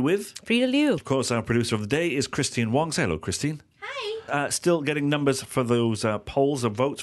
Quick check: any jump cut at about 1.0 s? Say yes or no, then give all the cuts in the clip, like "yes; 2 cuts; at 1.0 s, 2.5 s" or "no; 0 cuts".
yes; 2 cuts; at 1.0 s, 4.3 s